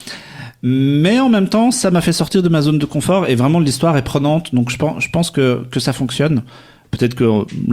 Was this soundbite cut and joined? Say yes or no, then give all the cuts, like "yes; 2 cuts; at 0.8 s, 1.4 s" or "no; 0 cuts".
no; 0 cuts